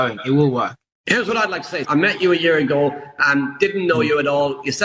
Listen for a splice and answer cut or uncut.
cut